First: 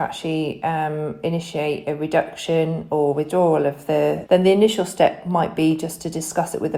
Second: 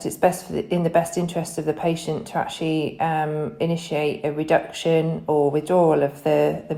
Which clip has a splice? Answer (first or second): first